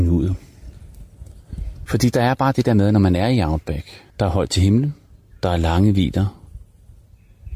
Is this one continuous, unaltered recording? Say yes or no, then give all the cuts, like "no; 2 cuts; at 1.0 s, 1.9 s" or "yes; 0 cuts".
no; 2 cuts; at 1.9 s, 4.1 s